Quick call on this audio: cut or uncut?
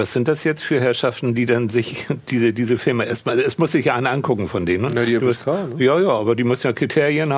uncut